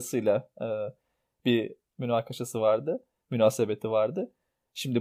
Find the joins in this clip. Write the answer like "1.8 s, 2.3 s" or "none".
none